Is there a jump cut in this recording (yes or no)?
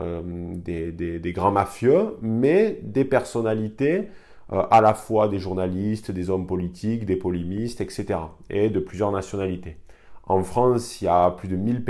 no